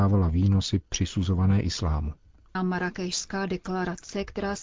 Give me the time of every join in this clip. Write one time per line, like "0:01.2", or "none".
0:02.5

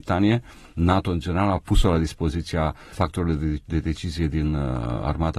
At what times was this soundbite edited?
0:02.9

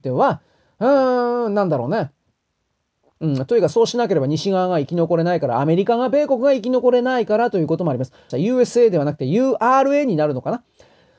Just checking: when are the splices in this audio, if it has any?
0:03.1
0:08.3

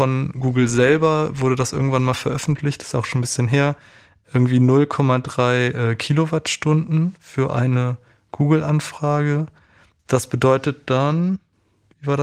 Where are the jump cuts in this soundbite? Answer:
none

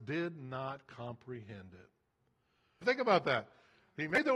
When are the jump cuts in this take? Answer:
0:02.8

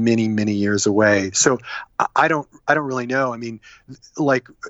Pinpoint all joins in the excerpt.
none

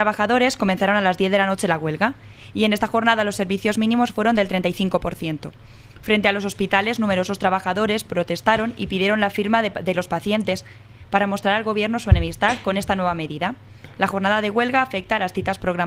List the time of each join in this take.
none

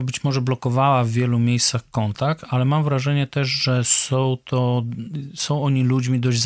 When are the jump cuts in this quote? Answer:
none

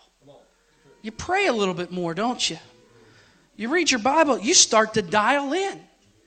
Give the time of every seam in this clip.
none

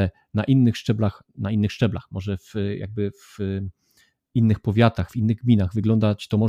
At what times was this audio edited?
none

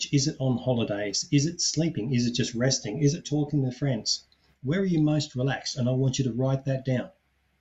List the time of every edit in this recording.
none

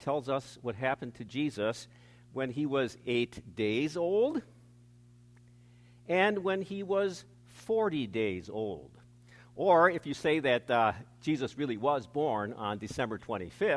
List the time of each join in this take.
none

